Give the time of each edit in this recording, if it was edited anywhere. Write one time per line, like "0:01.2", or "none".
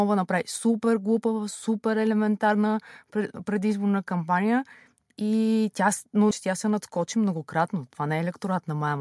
0:06.3
0:07.9